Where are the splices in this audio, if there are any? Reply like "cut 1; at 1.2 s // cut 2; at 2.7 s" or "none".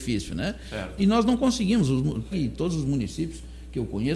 cut 1; at 1.0 s // cut 2; at 2.3 s